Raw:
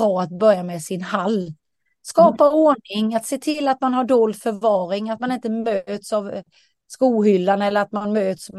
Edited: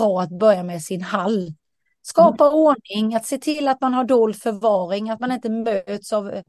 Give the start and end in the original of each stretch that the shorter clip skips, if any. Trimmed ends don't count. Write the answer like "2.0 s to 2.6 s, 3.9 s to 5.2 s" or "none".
none